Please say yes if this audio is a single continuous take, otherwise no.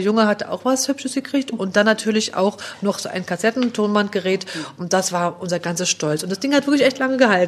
yes